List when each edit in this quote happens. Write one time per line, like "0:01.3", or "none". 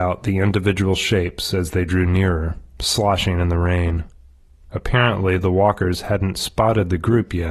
none

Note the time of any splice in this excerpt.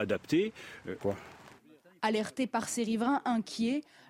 0:01.0

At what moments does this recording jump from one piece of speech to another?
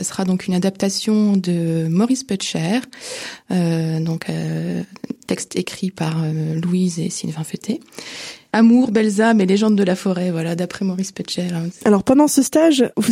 none

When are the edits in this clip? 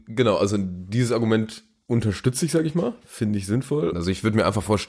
0:03.9

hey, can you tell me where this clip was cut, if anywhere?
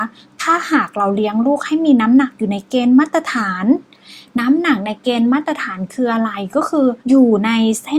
0:07.0

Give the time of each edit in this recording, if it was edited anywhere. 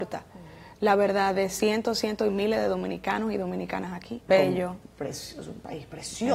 0:04.3

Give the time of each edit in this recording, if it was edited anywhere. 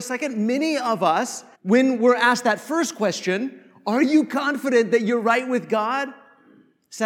0:01.5

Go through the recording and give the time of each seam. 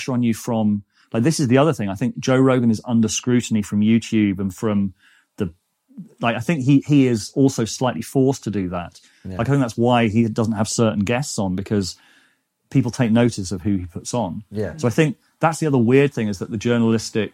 none

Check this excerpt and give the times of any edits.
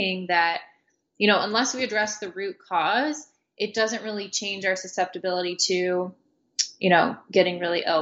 none

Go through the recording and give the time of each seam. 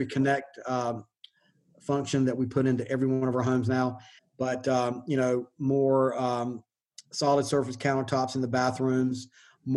0:04.2

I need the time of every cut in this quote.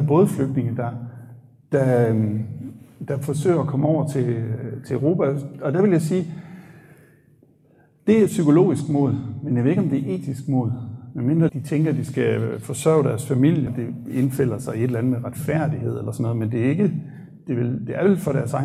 0:11.5
0:13.7

